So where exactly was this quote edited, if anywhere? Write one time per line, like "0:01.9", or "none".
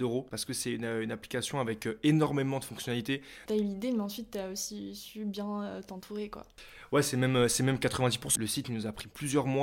0:03.5
0:08.3

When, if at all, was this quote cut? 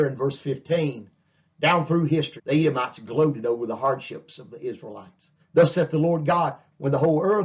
0:02.4
0:05.4

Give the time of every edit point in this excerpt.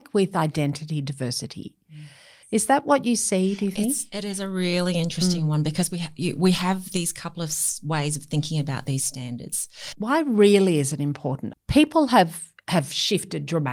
0:02.4
0:09.9
0:11.5

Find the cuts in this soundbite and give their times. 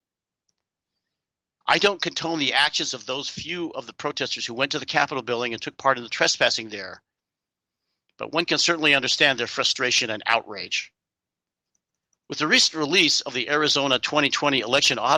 0:01.6

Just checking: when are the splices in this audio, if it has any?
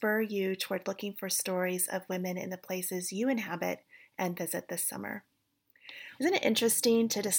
0:06.2

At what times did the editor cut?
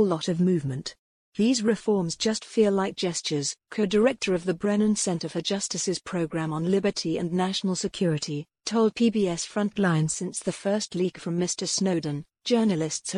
0:03.6

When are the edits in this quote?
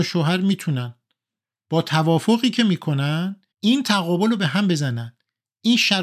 0:03.5

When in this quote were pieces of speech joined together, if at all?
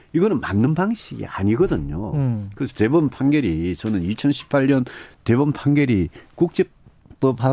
none

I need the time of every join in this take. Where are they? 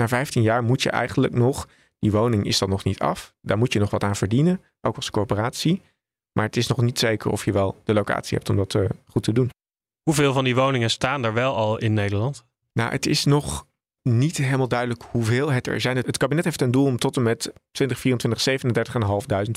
none

